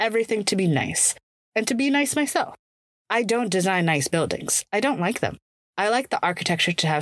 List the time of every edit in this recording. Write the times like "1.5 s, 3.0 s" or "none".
2.9 s